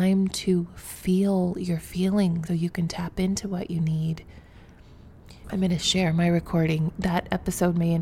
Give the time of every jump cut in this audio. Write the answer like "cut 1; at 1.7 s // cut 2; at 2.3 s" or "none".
cut 1; at 2.5 s // cut 2; at 5.4 s // cut 3; at 6.9 s